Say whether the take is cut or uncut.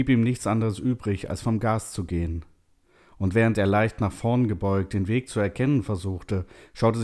uncut